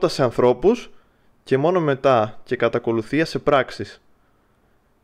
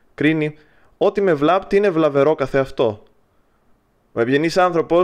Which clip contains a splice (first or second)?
second